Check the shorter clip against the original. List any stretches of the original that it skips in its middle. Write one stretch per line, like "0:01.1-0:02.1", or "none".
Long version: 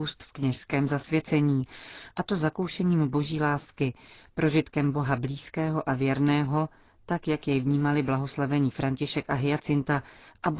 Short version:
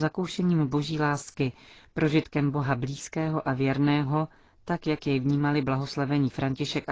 none